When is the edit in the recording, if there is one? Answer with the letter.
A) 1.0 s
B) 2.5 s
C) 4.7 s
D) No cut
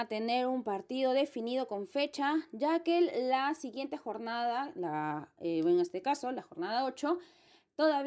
D